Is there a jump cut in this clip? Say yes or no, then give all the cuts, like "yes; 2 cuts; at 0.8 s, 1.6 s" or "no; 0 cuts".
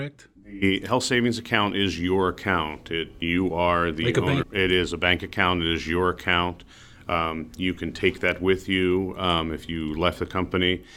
yes; 1 cut; at 4.4 s